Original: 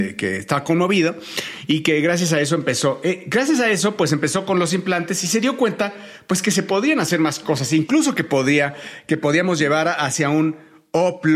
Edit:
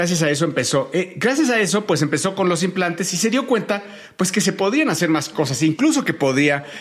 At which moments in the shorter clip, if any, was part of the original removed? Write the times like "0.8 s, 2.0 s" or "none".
none